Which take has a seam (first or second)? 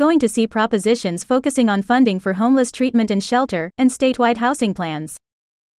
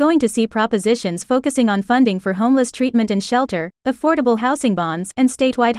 first